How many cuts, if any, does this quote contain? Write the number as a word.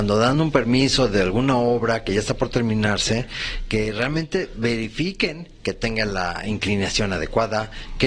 zero